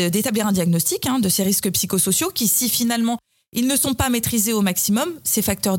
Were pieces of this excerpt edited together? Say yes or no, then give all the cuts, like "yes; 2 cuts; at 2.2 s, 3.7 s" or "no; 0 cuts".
no; 0 cuts